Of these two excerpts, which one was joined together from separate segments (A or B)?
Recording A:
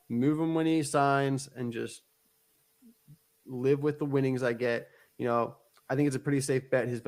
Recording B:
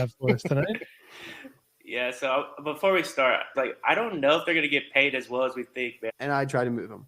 B